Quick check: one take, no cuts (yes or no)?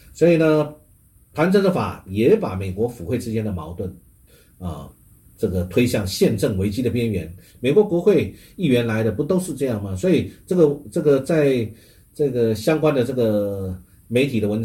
no